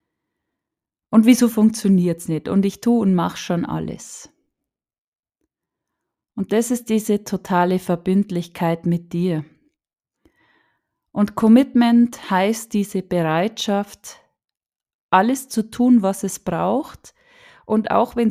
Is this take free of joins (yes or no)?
yes